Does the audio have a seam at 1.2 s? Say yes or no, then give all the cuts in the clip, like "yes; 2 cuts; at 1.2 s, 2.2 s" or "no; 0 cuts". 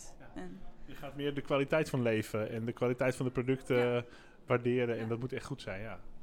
no; 1 cut; at 4.5 s